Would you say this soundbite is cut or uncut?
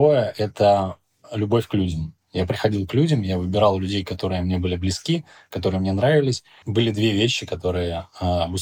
cut